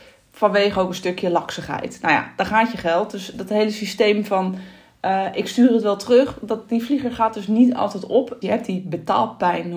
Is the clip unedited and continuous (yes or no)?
no